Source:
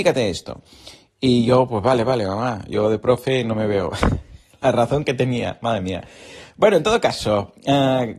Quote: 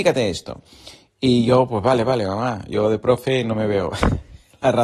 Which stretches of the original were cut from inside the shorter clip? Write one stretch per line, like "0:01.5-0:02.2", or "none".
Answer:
none

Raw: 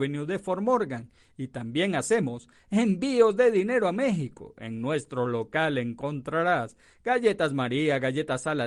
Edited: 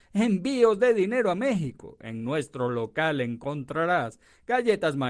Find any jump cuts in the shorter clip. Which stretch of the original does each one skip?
none

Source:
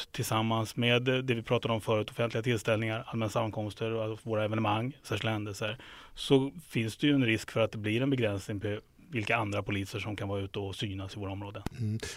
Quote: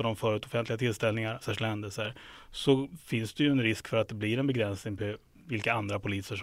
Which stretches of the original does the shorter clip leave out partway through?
0:03.0-0:05.0

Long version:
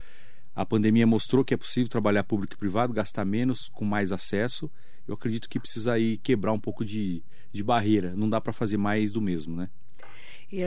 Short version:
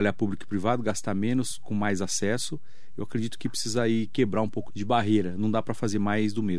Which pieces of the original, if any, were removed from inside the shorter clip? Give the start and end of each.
0:06.8-0:07.4

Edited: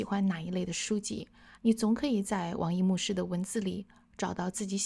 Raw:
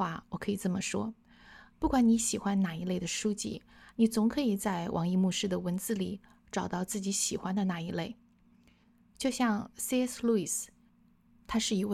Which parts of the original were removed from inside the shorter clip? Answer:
none

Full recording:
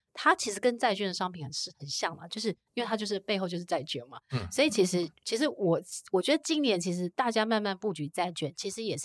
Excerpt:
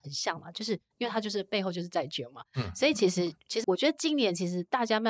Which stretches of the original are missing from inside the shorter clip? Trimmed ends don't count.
0:05.4-0:06.1

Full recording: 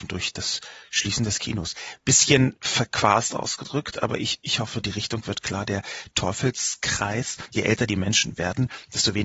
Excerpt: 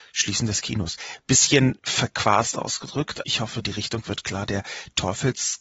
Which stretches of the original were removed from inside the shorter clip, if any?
0:04.0-0:04.4

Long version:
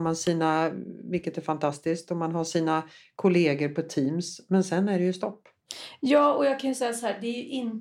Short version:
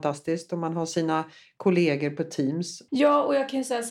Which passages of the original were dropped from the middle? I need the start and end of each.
0:04.5-0:06.0

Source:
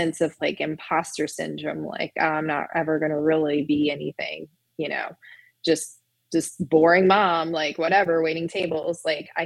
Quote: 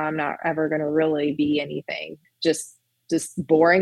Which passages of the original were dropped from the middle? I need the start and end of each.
0:04.6-0:05.5

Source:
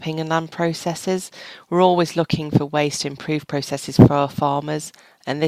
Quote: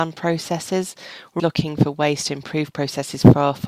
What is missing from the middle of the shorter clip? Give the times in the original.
0:01.7-0:02.1

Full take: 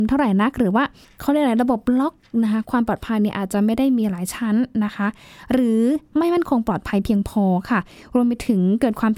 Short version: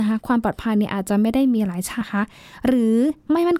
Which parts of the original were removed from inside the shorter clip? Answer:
0:04.4-0:04.9

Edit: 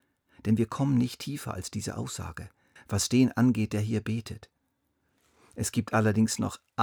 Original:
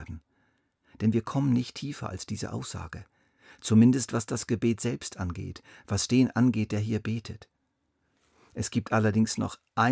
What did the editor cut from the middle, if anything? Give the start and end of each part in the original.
0:03.3-0:05.7

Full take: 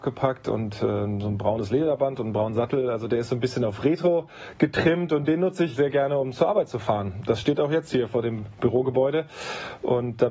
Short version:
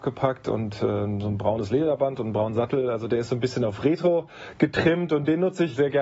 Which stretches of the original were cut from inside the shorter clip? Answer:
none

